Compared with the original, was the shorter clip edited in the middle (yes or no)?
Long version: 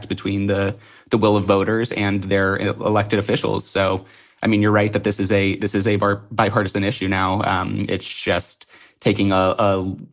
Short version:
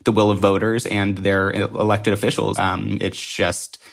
yes